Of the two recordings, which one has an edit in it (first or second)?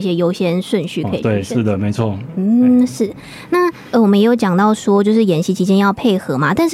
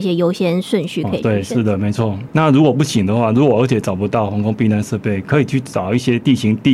second